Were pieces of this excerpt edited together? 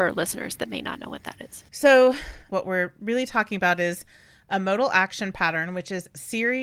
yes; 1 cut; at 2.5 s

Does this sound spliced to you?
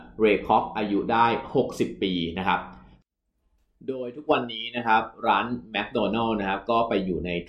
no; 0 cuts

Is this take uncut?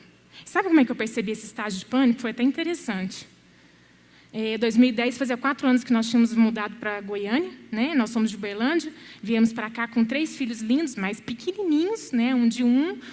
yes; 0 cuts

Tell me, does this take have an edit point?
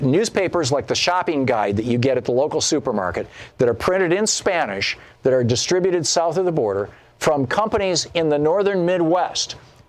no; 0 cuts

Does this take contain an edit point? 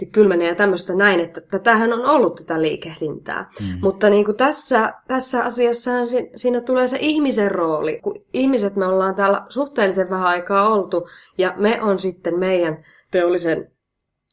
yes; 1 cut; at 8.0 s

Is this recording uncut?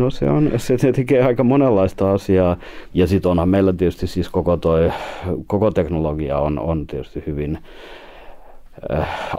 no; 1 cut; at 2.9 s

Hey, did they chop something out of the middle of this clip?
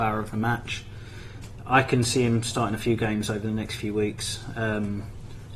no; 0 cuts

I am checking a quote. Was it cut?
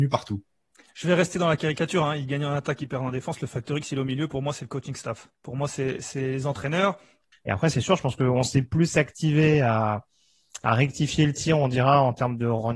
yes; 2 cuts; at 5.3 s, 7.3 s

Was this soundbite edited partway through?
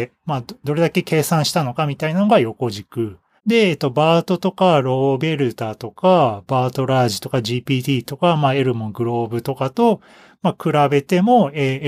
yes; 1 cut; at 3.4 s

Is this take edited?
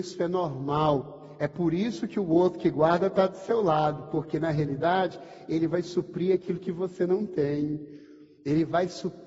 no; 0 cuts

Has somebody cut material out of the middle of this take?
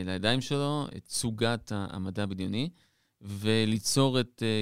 yes; 1 cut; at 0.9 s

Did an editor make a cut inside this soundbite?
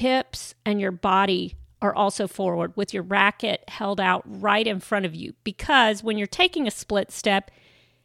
no; 0 cuts

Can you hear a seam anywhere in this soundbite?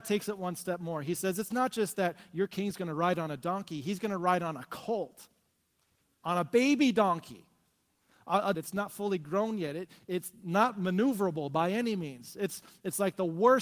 yes; 1 cut; at 8.5 s

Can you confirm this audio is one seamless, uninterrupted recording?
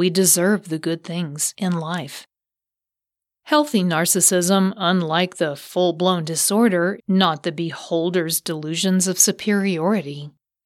no; 1 cut; at 7.0 s

